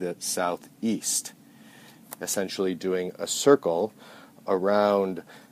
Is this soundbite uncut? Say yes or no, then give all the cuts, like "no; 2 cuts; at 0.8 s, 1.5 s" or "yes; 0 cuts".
yes; 0 cuts